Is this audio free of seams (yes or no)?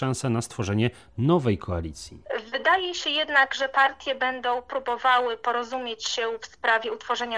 yes